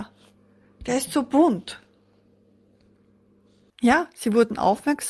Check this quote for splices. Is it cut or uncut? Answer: cut